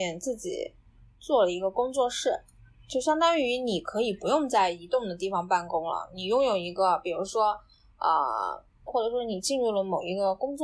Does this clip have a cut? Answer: yes; 1 cut; at 8.9 s

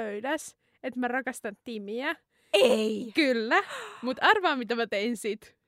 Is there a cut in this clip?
no; 0 cuts

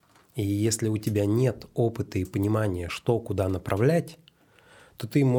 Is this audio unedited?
yes; 0 cuts

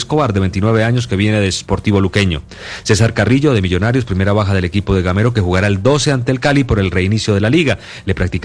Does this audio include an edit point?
no; 0 cuts

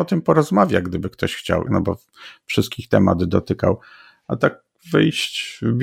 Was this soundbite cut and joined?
yes; 1 cut; at 1.7 s

